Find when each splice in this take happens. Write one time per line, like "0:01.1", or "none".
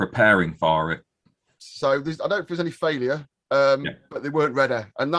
0:01.6